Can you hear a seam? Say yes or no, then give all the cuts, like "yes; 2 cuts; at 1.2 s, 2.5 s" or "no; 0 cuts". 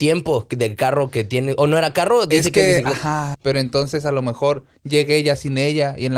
yes; 1 cut; at 3.3 s